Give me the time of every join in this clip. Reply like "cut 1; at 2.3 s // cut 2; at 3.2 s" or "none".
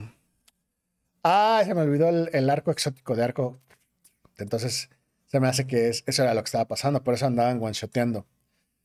cut 1; at 4.4 s